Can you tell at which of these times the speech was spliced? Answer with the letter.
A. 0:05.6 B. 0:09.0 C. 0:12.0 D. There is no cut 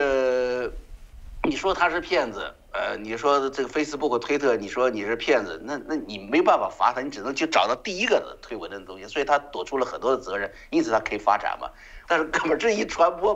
C